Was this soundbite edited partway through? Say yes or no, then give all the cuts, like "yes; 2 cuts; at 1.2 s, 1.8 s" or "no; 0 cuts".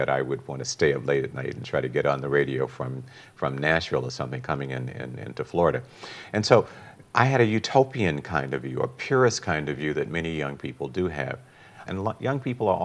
yes; 2 cuts; at 7.1 s, 11.9 s